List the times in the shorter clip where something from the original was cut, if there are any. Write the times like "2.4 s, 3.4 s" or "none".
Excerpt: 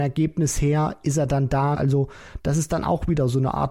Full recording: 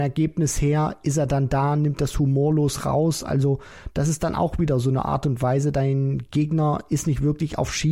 1.7 s